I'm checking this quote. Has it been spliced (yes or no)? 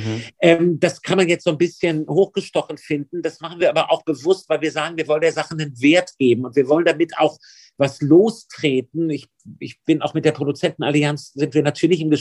no